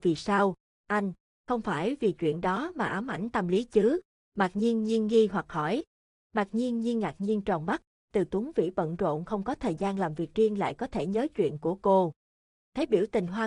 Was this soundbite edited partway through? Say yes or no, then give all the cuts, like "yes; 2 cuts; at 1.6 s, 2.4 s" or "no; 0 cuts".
yes; 1 cut; at 6.2 s